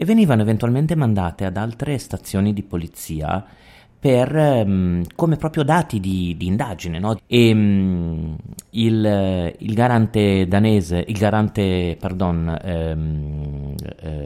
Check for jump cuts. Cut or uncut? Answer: cut